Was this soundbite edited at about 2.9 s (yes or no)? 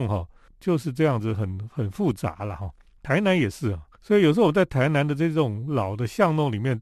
no